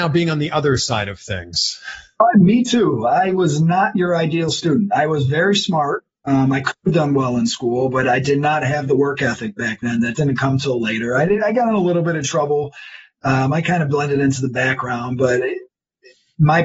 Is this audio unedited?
yes; 0 cuts

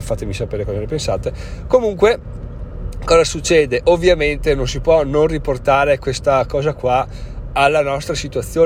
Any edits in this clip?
no; 0 cuts

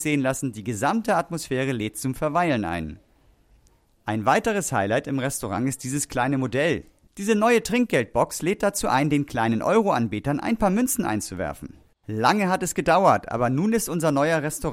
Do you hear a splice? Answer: yes; 2 cuts; at 7.1 s, 11.9 s

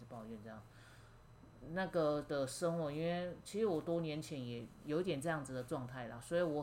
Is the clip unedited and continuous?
yes; 0 cuts

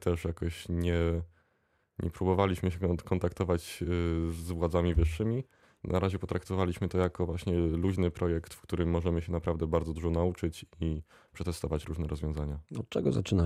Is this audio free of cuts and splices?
yes; 0 cuts

